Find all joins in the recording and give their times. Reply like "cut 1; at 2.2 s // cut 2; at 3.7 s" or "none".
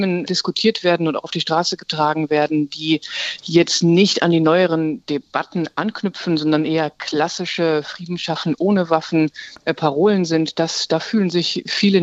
none

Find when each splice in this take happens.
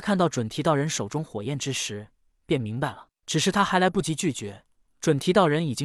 none

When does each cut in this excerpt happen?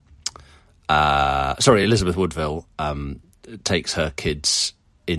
none

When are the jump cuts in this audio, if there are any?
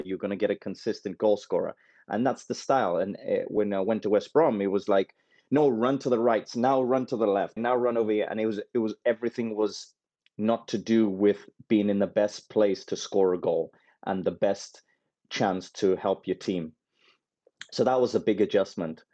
cut 1; at 7.6 s

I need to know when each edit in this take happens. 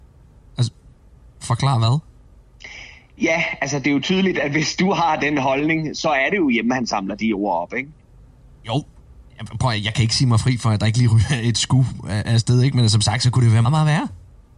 cut 1; at 13.6 s

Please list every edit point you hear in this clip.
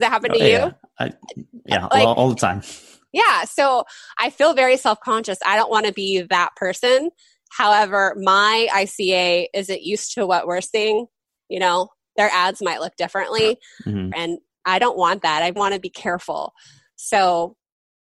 cut 1; at 14.1 s // cut 2; at 15.6 s

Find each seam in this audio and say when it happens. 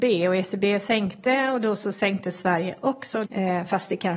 cut 1; at 3.2 s

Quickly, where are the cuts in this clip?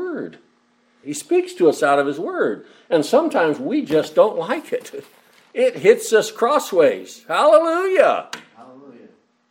cut 1; at 1.0 s

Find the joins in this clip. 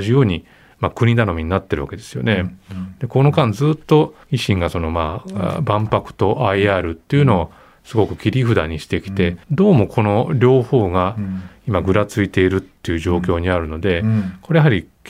cut 1; at 4.2 s // cut 2; at 9.4 s

